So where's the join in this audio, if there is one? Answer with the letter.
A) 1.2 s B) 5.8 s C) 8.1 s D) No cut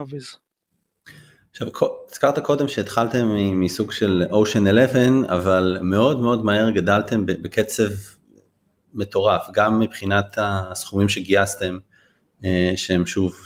D